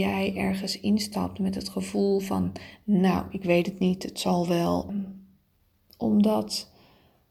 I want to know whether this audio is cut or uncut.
cut